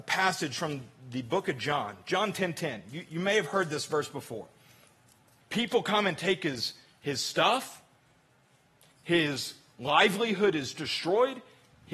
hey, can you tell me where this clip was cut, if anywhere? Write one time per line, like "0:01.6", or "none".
0:05.4